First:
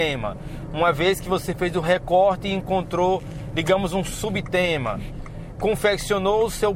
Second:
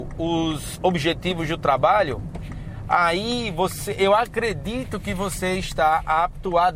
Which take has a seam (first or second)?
first